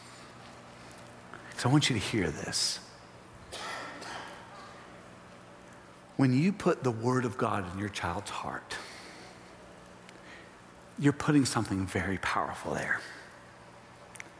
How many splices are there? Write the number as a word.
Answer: zero